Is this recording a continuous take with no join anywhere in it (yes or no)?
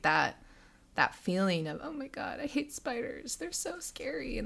yes